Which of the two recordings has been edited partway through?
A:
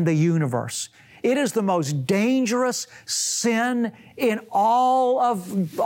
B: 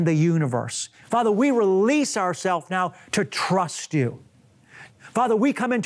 B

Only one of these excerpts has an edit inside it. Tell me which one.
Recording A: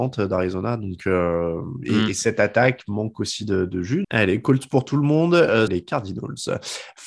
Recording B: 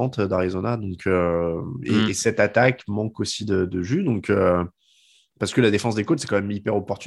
A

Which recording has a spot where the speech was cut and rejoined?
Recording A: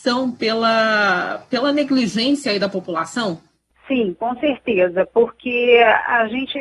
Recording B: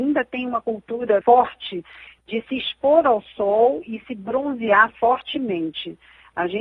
B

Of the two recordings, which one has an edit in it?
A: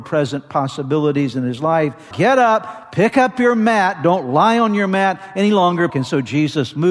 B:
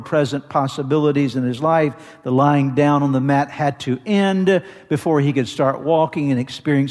A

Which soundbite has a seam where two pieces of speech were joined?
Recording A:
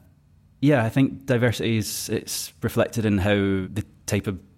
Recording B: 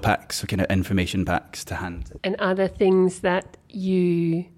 B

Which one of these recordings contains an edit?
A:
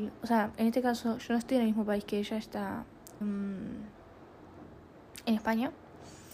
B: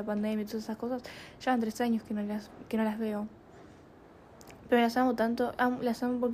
A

